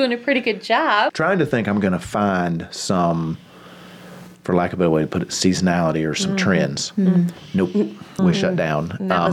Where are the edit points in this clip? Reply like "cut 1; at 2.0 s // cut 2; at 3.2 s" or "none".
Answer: cut 1; at 1.1 s // cut 2; at 8.2 s